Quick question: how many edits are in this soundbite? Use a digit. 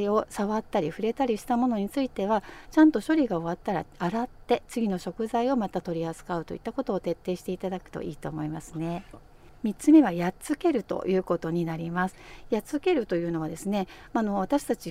1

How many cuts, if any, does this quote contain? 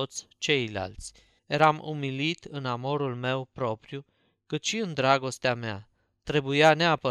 1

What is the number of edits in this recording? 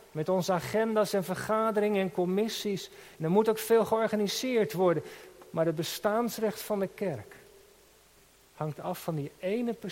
0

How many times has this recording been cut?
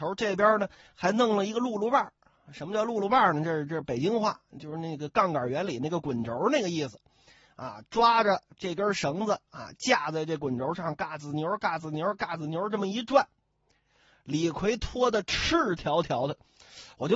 0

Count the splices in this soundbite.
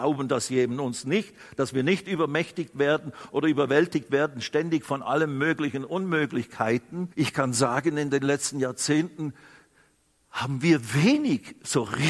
1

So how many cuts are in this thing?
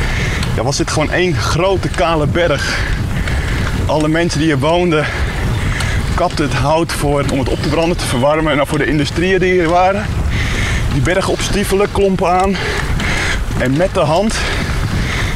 3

